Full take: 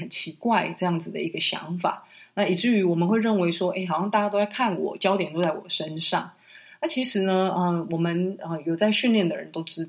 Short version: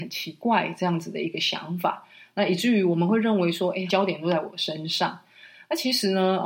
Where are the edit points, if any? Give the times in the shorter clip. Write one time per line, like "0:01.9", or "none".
0:03.9